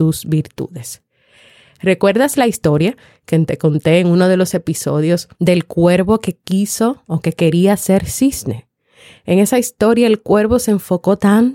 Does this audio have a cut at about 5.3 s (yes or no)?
yes